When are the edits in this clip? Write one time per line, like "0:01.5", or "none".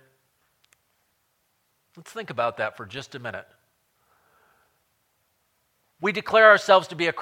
none